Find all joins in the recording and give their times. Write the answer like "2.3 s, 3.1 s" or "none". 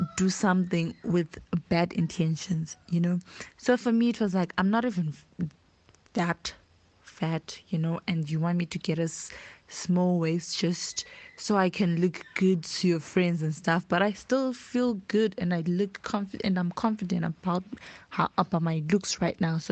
none

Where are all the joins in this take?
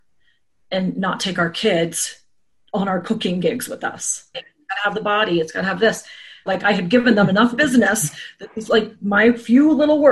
4.3 s, 6.5 s

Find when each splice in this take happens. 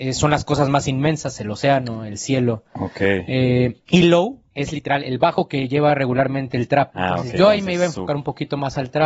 none

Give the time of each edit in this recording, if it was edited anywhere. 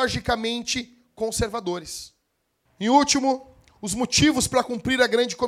2.7 s

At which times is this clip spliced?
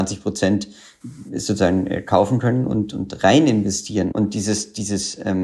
4.1 s

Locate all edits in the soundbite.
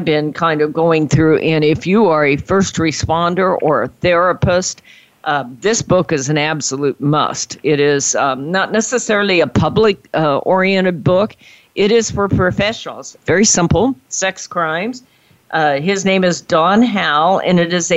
13.2 s

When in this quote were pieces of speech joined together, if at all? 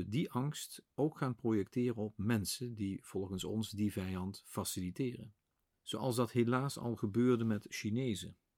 5.7 s

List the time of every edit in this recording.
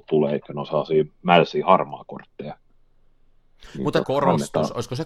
4.0 s

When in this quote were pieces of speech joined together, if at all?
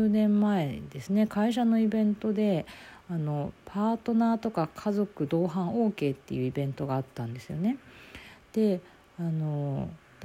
none

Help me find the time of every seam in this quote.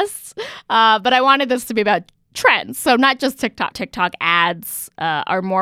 3.7 s

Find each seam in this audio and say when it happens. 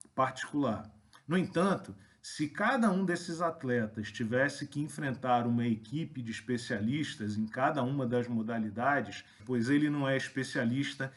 1.1 s, 9.4 s

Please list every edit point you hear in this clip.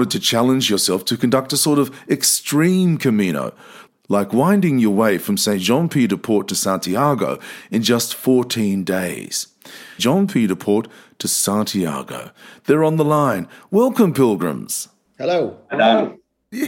10.0 s

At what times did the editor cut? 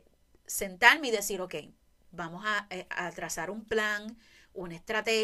none

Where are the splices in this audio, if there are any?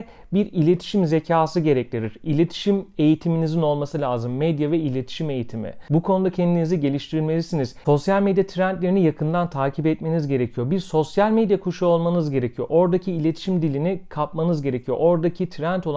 7.8 s

